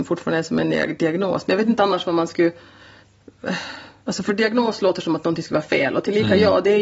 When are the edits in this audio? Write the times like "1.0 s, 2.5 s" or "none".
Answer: none